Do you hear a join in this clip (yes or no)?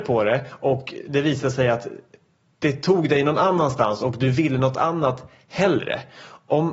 no